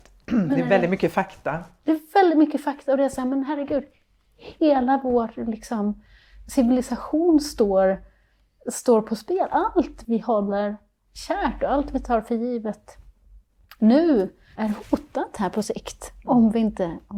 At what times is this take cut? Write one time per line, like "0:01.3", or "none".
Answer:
0:10.0
0:14.6